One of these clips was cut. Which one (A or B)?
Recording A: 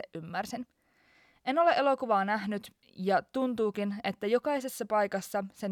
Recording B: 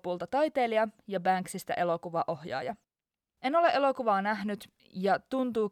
B